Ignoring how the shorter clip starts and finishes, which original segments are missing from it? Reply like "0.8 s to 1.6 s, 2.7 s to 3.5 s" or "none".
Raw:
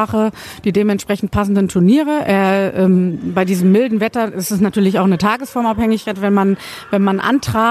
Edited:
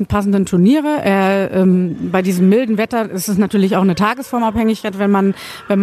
none